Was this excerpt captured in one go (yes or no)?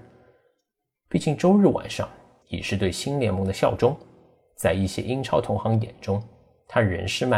no